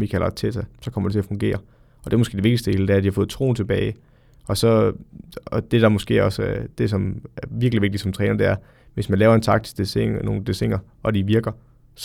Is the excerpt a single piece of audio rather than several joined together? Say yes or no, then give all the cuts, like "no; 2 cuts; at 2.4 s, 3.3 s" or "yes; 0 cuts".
yes; 0 cuts